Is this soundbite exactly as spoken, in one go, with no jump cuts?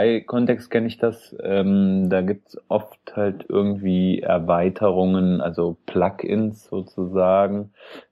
yes; 0 cuts

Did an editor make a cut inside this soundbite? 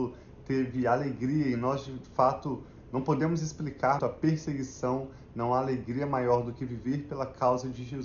yes; 1 cut; at 4.0 s

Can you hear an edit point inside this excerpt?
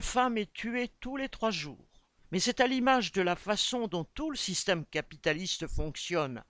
yes; 1 cut; at 2.2 s

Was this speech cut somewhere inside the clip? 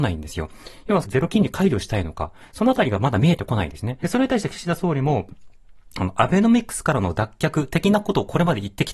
yes; 3 cuts; at 1.0 s, 2.4 s, 4.0 s

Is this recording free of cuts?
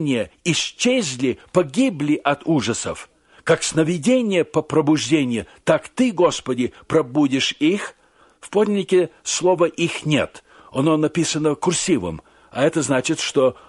yes; 0 cuts

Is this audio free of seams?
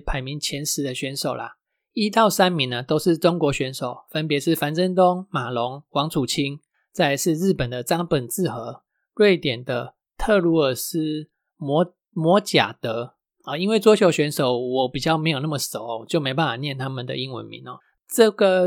yes; 0 cuts

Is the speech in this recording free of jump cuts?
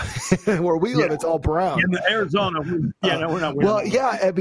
yes; 0 cuts

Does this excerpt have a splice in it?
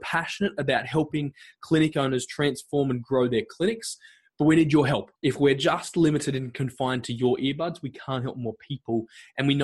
yes; 1 cut; at 5.2 s

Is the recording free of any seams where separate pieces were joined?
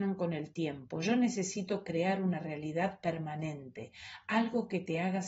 yes; 0 cuts

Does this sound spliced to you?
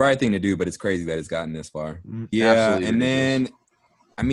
yes; 1 cut; at 2.3 s

